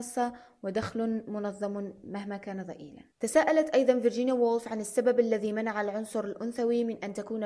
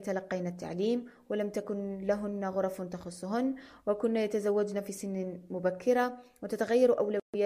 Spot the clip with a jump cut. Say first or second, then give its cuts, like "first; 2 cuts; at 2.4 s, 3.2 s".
first; 1 cut; at 3.1 s